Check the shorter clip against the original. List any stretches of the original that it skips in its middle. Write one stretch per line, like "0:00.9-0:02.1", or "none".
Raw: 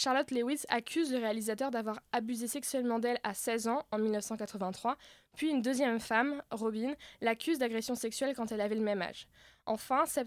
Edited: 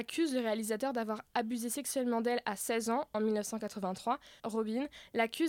0:05.2-0:06.5